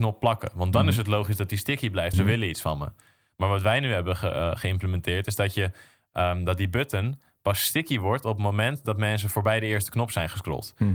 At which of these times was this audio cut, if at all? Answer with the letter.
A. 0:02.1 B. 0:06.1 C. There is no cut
A